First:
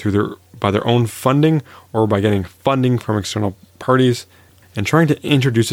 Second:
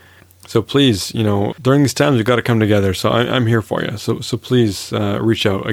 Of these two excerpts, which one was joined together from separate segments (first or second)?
second